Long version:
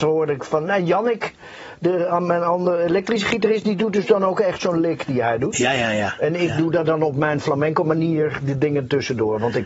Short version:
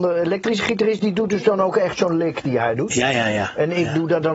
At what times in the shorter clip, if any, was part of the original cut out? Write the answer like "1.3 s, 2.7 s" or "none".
none